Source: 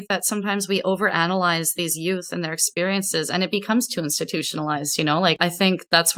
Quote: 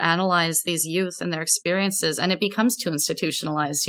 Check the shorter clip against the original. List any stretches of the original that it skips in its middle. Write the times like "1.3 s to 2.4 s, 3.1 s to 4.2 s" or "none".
none